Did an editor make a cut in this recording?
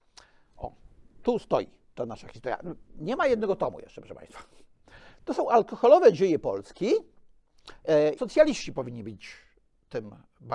yes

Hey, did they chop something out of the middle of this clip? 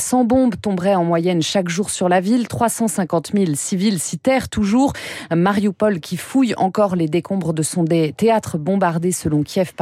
no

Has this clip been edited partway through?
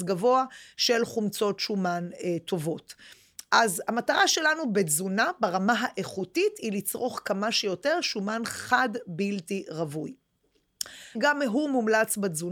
yes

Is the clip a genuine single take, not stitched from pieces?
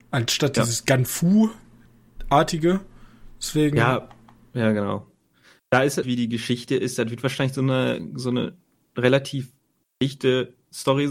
no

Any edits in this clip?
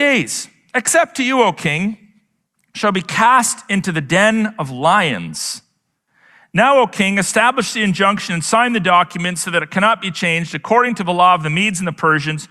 no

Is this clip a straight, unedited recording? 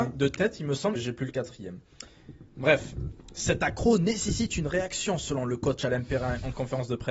no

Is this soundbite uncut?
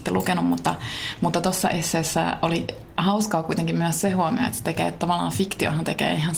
yes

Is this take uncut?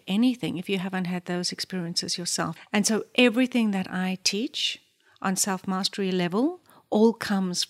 no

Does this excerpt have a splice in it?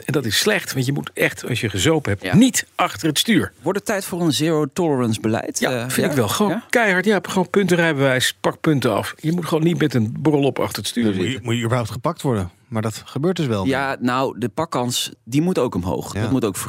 no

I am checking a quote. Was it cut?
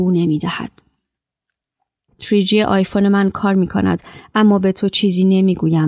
yes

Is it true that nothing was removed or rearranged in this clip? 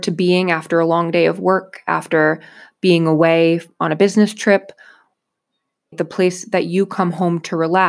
no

